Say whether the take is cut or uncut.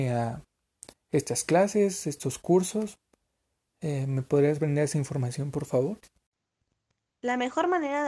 uncut